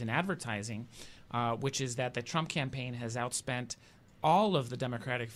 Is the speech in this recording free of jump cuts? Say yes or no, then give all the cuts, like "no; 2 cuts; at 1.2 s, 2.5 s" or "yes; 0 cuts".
yes; 0 cuts